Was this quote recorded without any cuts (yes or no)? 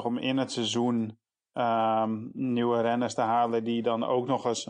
yes